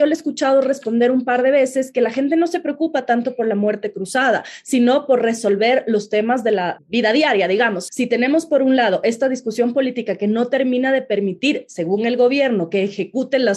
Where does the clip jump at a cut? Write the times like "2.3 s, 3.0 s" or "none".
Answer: 6.8 s, 7.9 s